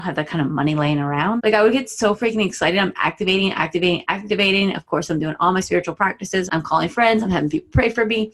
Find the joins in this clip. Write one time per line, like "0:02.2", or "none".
0:01.4
0:06.5